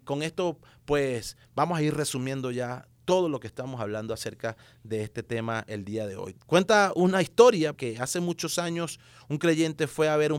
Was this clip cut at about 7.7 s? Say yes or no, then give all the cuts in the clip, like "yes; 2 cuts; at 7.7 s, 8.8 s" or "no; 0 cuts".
yes; 2 cuts; at 6.3 s, 7.7 s